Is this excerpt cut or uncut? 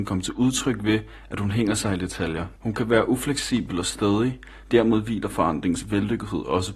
cut